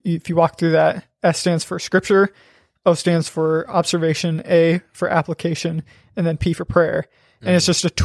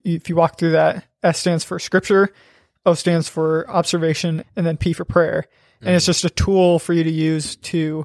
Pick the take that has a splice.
second; 1 cut; at 4.4 s

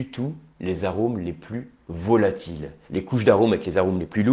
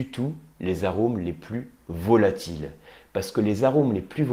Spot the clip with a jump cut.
first; 1 cut; at 2.9 s

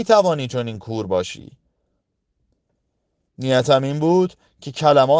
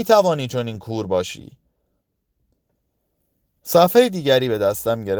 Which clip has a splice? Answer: first; 1 cut; at 3.3 s

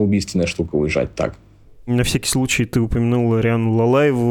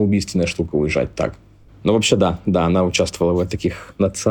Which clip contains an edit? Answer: second; 1 cut; at 1.7 s

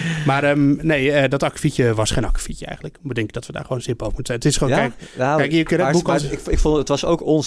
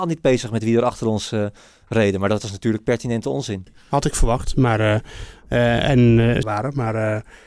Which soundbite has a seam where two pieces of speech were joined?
second; 2 cuts; at 3.7 s, 6.4 s

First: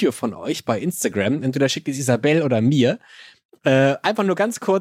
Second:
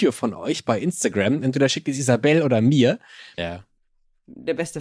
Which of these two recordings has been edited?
second; 1 cut; at 3.4 s

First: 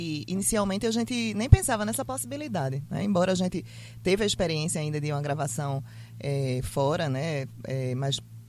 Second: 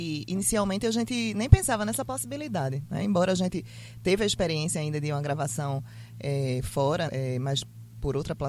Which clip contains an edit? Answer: second; 1 cut; at 7.1 s

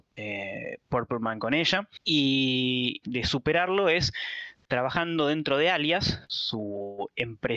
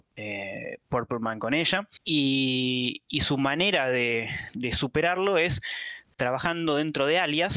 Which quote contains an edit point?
first; 2 cuts; at 3.0 s, 6.3 s

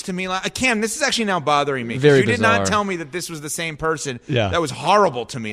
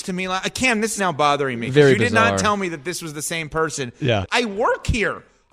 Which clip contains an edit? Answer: second; 2 cuts; at 1.0 s, 4.2 s

